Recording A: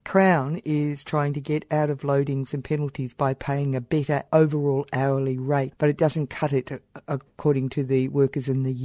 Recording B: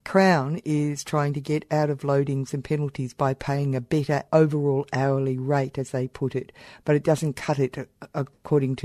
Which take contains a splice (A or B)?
A